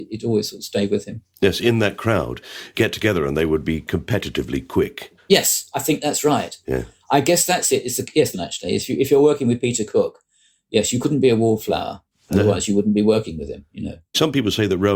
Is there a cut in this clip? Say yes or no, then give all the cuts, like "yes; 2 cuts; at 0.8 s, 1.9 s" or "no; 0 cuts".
yes; 1 cut; at 8.3 s